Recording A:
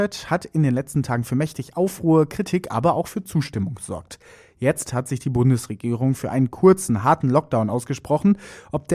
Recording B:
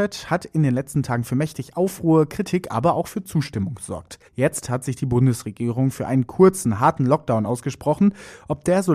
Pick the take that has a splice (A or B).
B